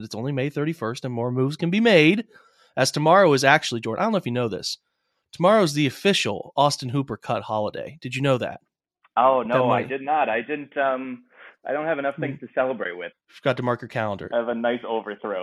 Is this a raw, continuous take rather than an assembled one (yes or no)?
no